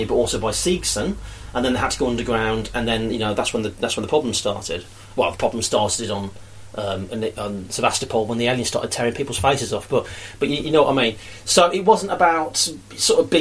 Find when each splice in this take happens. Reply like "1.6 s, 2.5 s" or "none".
none